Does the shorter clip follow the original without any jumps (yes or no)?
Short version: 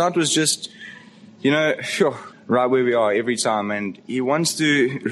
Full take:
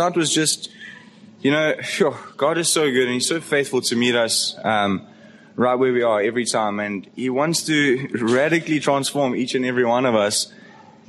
no